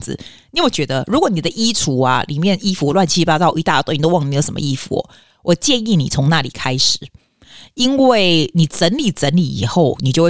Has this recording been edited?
no; 0 cuts

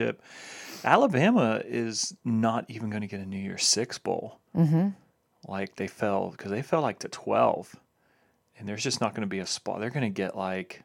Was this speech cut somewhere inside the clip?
yes; 1 cut; at 4.5 s

